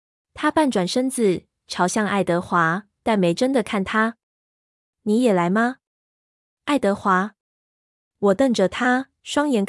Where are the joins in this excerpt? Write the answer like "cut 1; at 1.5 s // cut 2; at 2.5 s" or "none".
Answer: none